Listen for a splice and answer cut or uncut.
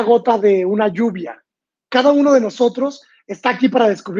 cut